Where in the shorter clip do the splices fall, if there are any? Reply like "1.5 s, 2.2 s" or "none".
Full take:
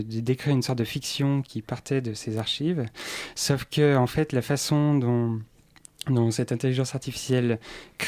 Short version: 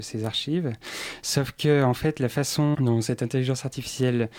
2.7 s